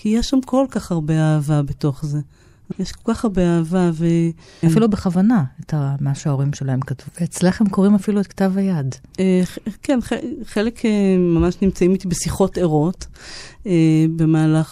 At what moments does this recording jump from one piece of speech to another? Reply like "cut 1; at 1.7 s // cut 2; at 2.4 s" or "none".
cut 1; at 2.7 s // cut 2; at 4.6 s // cut 3; at 7.1 s

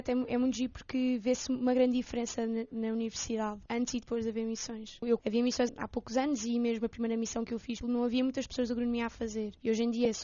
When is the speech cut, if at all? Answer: cut 1; at 5.2 s // cut 2; at 7.8 s

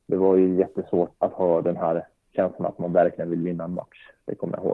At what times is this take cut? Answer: cut 1; at 1.1 s

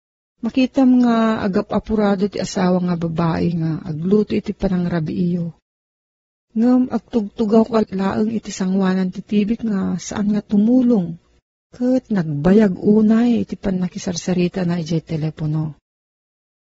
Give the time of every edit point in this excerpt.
cut 1; at 11.5 s

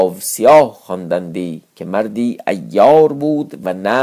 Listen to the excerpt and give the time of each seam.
cut 1; at 1.7 s

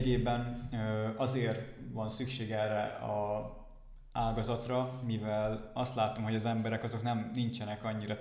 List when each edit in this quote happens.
none

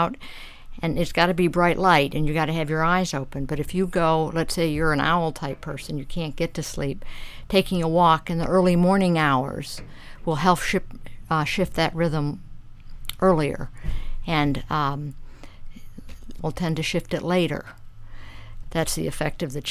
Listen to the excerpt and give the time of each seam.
cut 1; at 16.4 s // cut 2; at 18.6 s

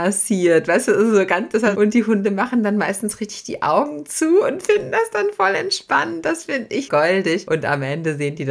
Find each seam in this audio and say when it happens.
cut 1; at 1.7 s // cut 2; at 6.9 s

